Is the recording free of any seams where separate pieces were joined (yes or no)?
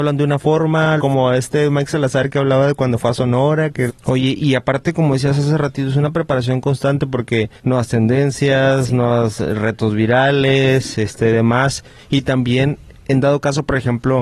no